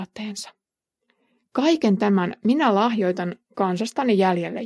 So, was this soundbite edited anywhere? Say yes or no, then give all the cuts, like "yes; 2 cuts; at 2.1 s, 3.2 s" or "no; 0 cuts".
no; 0 cuts